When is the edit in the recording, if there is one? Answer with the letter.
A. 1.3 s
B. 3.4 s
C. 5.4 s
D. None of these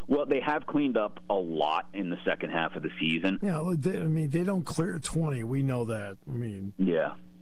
B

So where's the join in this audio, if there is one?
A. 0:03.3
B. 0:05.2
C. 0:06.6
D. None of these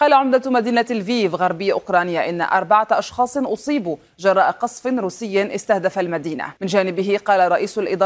C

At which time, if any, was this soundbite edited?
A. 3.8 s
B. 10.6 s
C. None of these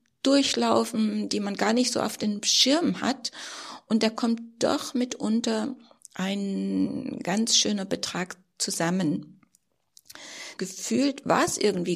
B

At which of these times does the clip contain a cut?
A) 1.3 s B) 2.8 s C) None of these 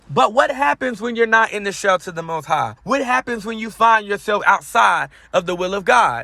B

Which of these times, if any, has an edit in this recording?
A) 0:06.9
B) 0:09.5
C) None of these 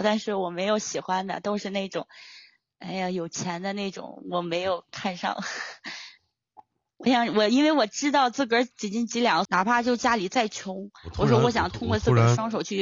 B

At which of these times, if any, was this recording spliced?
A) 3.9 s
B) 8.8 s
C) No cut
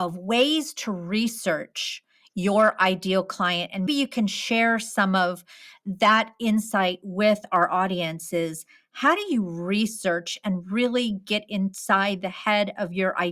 A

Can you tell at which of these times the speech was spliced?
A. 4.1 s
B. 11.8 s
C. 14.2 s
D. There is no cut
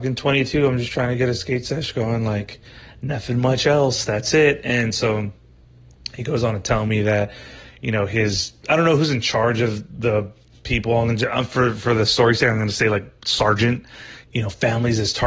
C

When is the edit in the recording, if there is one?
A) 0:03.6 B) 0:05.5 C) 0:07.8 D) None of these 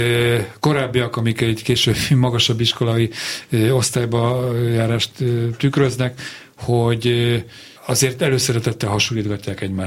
C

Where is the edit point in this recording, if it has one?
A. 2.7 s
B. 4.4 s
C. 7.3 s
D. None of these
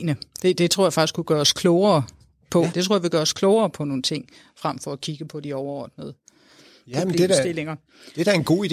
A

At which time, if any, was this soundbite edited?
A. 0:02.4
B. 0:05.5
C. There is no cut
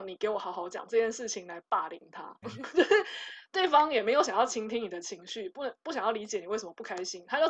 A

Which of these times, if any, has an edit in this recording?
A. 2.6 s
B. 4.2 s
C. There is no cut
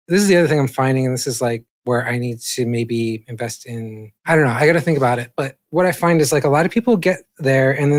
B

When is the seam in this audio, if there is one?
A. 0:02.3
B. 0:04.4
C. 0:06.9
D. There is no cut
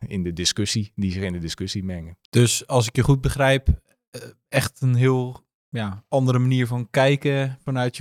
A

